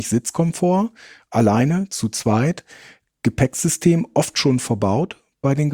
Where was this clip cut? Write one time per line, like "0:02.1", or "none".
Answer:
none